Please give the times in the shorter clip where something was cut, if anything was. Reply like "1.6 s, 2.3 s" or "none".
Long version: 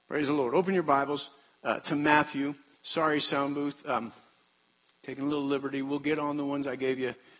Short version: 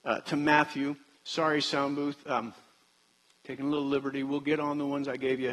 none